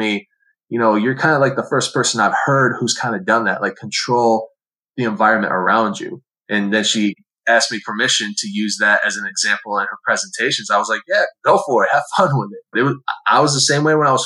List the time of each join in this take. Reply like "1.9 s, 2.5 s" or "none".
12.7 s